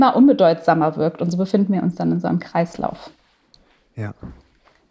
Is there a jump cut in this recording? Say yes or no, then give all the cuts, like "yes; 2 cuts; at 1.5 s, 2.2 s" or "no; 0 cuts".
no; 0 cuts